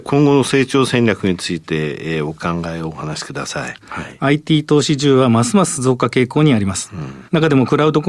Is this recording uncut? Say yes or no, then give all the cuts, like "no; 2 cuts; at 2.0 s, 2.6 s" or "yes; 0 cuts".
no; 1 cut; at 3.8 s